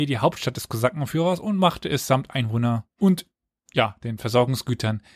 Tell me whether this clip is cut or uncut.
uncut